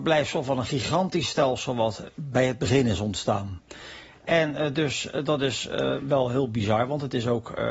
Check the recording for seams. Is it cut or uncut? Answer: uncut